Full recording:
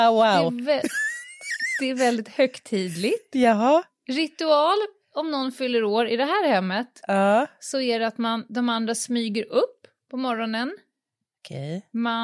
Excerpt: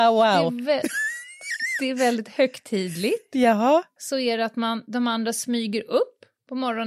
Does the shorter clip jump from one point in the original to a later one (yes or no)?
yes